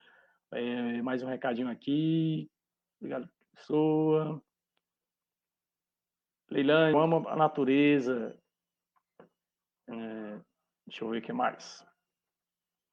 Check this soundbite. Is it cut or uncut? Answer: cut